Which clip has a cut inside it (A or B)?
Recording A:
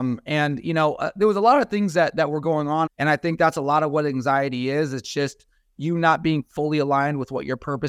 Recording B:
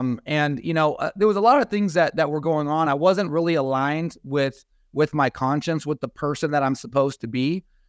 A